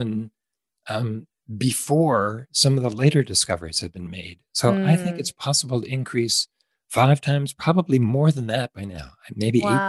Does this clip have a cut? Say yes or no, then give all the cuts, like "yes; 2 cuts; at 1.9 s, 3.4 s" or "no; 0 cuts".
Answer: yes; 1 cut; at 5.3 s